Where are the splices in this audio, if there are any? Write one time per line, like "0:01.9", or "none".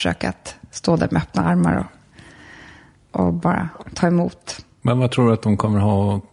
none